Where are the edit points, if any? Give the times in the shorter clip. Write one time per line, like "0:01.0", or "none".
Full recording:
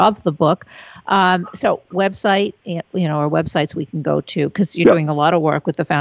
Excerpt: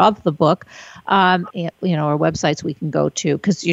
0:01.5

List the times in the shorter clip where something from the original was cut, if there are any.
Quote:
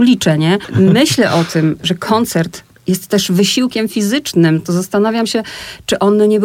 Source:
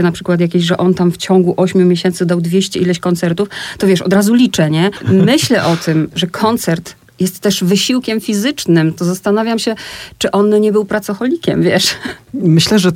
none

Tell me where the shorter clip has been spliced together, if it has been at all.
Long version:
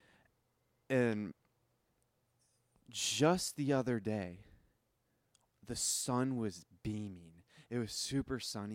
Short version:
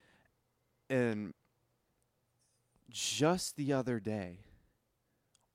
none

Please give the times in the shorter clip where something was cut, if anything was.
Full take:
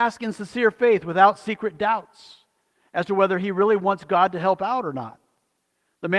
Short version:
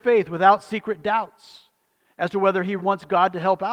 0:02.8

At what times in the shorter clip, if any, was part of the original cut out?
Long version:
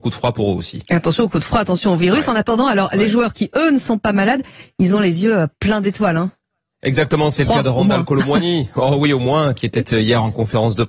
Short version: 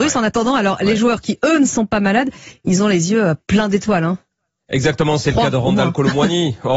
none

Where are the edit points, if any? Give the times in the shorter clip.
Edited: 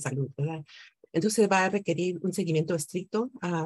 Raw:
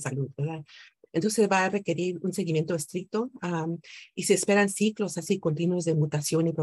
none

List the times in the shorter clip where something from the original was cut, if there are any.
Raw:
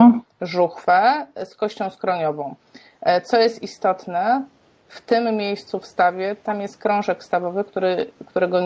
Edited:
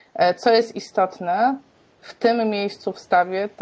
none

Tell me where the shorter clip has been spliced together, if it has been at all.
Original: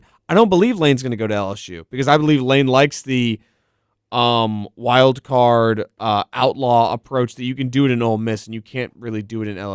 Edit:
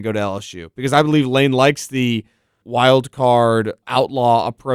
0:02.6
0:03.8

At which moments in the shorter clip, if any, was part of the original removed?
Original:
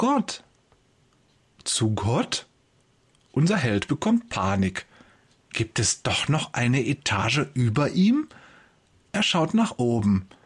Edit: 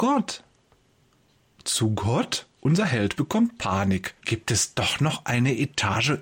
0:02.5
0:04.2

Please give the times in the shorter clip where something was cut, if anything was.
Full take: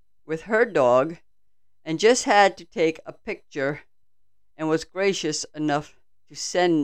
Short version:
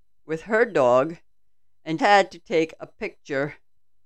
0:02.0

